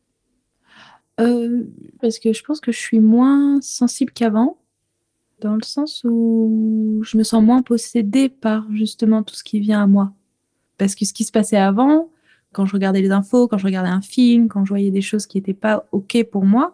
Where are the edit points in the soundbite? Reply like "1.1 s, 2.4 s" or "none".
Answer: 2.0 s, 10.7 s